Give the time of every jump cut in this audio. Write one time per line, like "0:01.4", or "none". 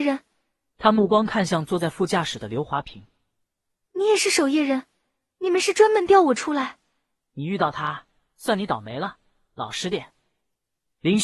none

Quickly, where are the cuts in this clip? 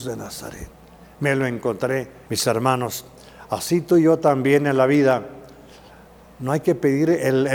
0:02.3

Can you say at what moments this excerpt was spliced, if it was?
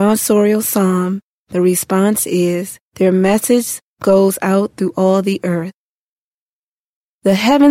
0:02.8

